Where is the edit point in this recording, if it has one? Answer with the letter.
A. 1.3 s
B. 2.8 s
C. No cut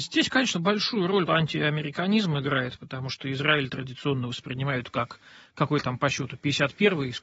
A